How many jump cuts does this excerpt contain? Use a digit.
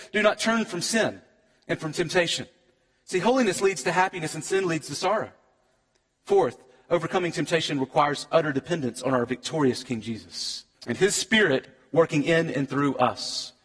1